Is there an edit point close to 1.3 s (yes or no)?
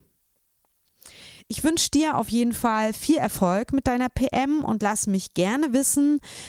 no